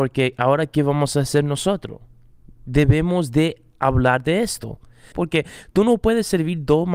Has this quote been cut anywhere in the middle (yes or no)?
yes